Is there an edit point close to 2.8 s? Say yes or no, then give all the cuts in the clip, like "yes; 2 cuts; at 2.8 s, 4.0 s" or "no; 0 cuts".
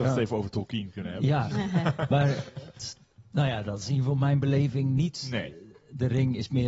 yes; 1 cut; at 2.8 s